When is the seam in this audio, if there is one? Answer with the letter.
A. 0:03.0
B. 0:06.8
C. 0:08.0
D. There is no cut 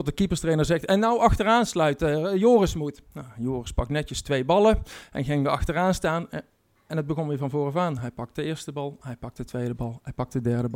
D